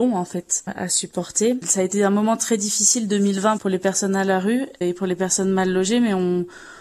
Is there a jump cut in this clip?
no; 0 cuts

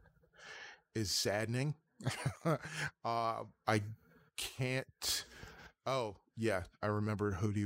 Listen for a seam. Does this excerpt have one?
no; 0 cuts

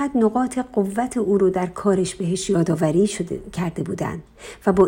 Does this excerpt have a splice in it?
no; 0 cuts

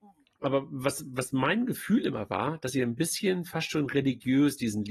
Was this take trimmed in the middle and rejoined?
no; 0 cuts

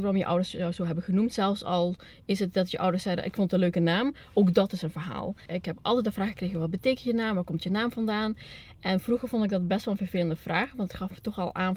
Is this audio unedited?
no; 1 cut; at 5.5 s

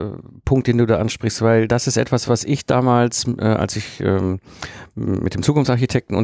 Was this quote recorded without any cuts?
yes; 0 cuts

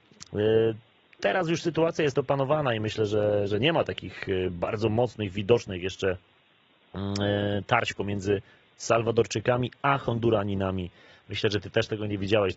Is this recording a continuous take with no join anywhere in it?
yes; 0 cuts

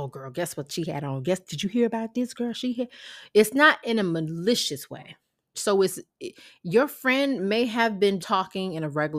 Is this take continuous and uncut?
no; 2 cuts; at 5.5 s, 8.2 s

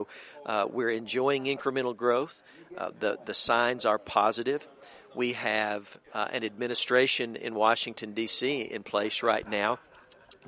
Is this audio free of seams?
yes; 0 cuts

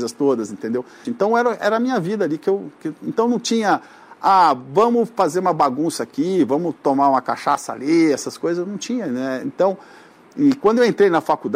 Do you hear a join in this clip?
yes; 1 cut; at 1.1 s

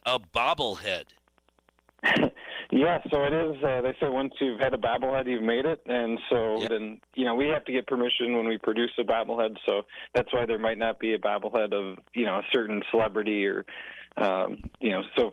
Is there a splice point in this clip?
yes; 1 cut; at 6.7 s

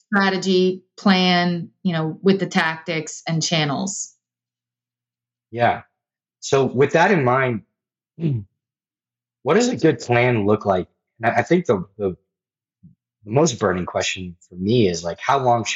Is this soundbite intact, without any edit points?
yes; 0 cuts

